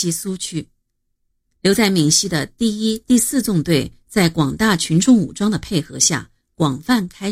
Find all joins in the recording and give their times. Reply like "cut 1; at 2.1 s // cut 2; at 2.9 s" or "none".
none